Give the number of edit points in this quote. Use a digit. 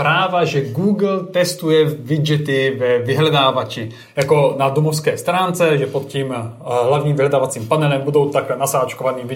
0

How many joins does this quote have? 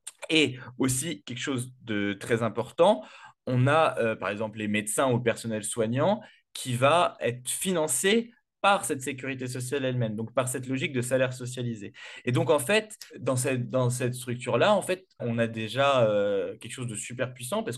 2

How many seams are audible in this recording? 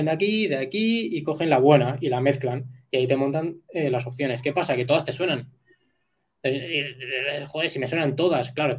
0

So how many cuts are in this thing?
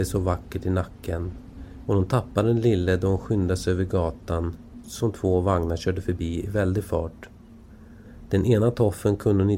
2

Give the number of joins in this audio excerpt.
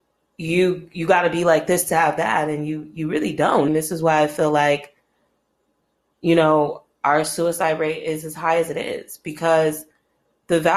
1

